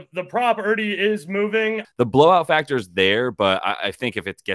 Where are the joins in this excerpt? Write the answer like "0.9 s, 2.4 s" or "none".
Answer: 1.8 s

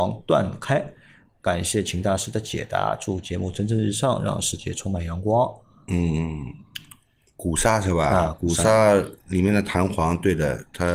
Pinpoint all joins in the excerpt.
none

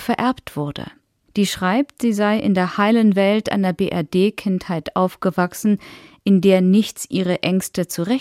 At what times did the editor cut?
1.3 s

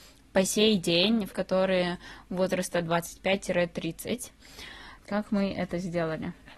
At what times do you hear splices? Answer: 1.3 s, 5.0 s

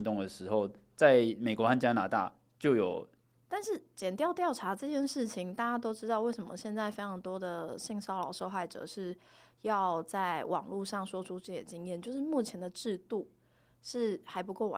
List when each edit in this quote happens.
3.4 s

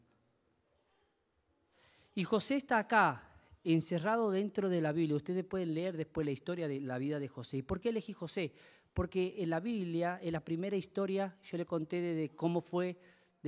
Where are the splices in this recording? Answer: none

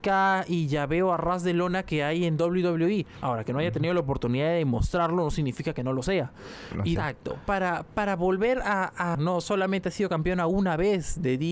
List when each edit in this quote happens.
7.0 s, 9.1 s

